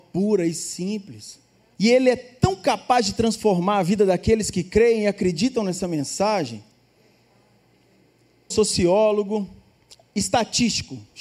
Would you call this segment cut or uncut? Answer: cut